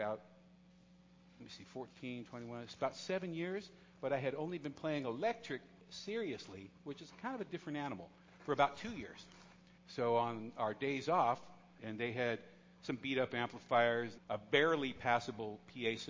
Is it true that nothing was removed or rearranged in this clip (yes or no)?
no